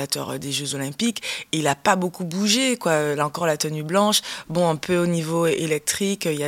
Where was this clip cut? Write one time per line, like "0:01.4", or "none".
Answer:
none